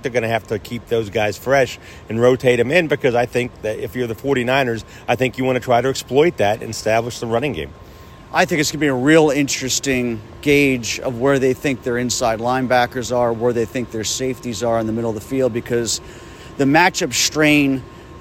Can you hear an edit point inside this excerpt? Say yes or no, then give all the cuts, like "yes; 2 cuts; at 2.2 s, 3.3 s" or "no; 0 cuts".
no; 0 cuts